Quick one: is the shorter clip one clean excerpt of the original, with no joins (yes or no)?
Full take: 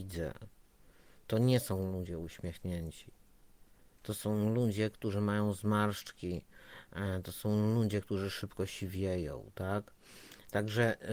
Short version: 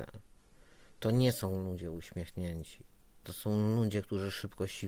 no